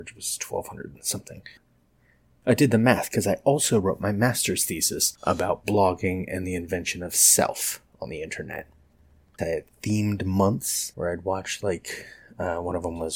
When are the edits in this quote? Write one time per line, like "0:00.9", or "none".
0:09.4